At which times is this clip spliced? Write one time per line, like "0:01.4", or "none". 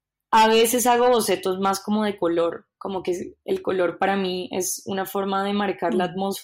none